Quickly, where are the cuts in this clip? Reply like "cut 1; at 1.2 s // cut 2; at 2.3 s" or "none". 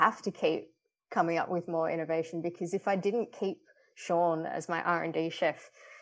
none